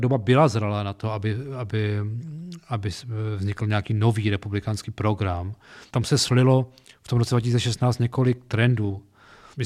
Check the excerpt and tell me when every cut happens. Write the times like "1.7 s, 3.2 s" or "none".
5.9 s